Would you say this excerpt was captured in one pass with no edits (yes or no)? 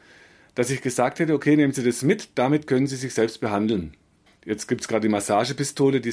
no